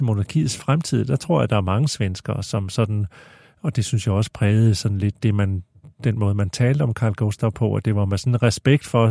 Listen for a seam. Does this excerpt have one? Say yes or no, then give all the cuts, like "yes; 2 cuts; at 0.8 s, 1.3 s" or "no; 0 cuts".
no; 0 cuts